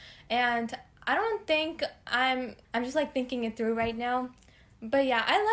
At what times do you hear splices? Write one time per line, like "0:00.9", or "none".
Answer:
0:02.7